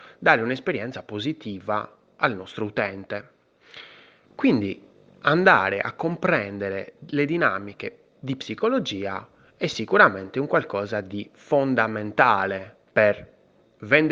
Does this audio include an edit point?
yes; 2 cuts; at 4.2 s, 12.9 s

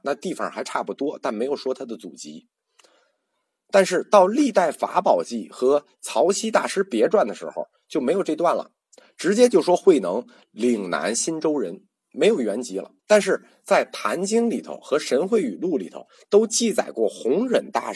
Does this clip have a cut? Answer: yes; 1 cut; at 13.0 s

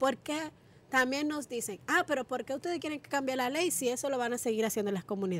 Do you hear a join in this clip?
no; 0 cuts

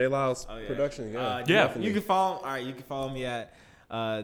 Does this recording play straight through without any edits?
yes; 0 cuts

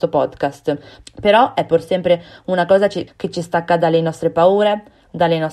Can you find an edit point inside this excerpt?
yes; 2 cuts; at 1.0 s, 3.1 s

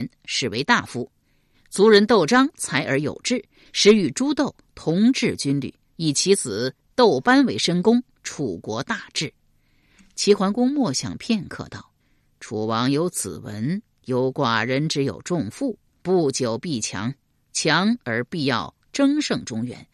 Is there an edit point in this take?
yes; 1 cut; at 12.0 s

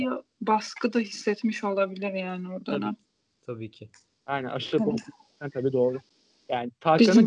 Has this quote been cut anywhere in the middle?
no; 0 cuts

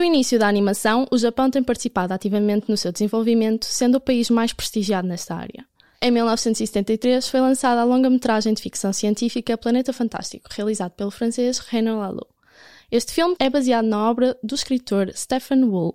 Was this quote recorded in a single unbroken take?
no; 1 cut; at 13.4 s

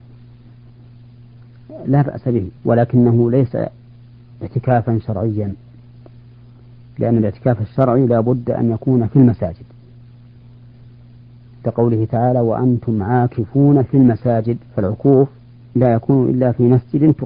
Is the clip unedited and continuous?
no; 2 cuts; at 2.6 s, 14.7 s

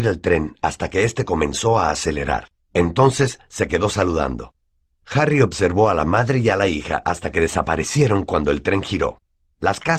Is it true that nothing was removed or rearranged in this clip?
yes; 0 cuts

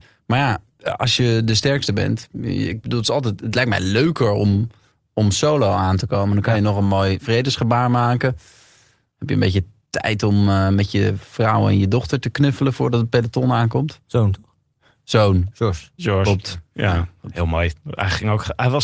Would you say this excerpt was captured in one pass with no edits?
no; 1 cut; at 15.5 s

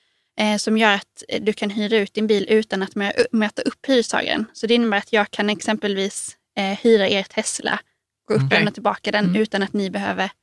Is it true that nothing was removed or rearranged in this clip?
no; 1 cut; at 8.5 s

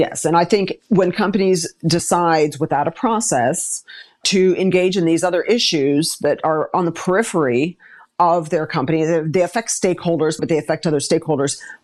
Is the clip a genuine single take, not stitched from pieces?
no; 1 cut; at 10.4 s

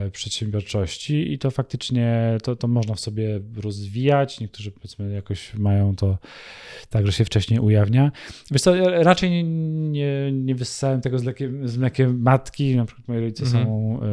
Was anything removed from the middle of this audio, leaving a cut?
no; 0 cuts

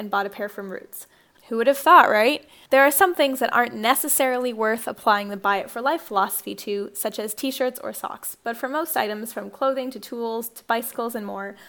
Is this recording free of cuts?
no; 1 cut; at 1.3 s

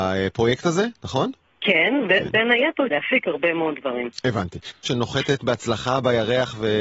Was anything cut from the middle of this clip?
yes; 2 cuts; at 2.9 s, 4.8 s

